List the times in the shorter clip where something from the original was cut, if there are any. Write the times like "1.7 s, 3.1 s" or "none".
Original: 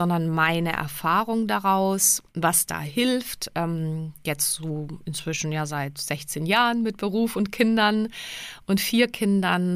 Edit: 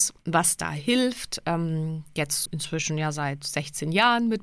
2.5 s